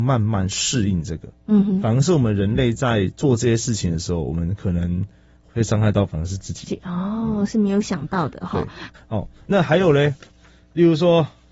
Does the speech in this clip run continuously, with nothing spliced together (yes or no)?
yes